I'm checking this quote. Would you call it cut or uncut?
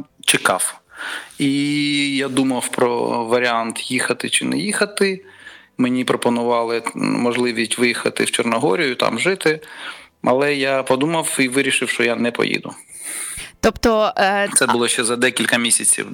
uncut